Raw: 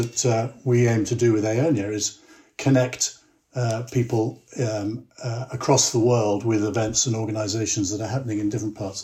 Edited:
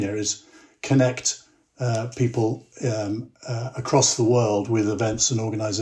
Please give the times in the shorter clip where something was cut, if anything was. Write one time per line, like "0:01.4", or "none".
none